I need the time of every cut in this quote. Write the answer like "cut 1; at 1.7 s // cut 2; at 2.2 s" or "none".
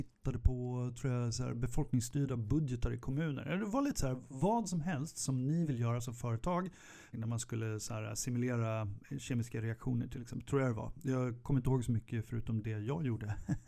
cut 1; at 7.1 s